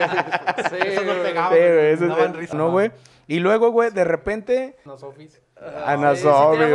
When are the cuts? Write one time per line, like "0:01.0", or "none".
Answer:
0:02.5
0:04.9